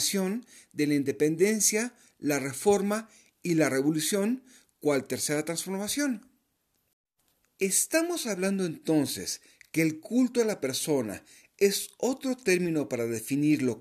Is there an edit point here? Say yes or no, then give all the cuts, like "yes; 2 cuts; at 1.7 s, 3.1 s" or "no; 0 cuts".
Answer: no; 0 cuts